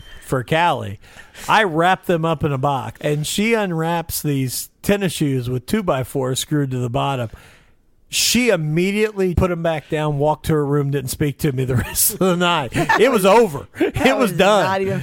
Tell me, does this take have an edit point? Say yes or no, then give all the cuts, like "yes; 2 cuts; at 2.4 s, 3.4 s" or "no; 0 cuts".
yes; 2 cuts; at 3.0 s, 9.3 s